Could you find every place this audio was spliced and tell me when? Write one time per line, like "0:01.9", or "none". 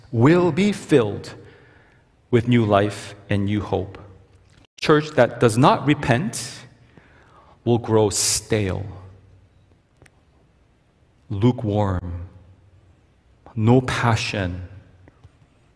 none